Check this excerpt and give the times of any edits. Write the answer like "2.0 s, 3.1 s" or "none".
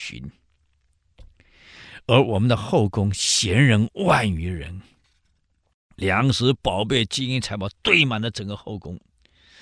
none